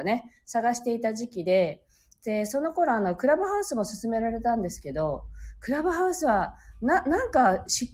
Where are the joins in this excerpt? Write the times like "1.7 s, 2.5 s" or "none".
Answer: none